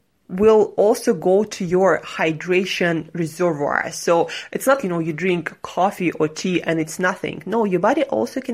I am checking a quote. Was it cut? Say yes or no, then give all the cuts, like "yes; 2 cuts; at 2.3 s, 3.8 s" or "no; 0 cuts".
yes; 1 cut; at 4.8 s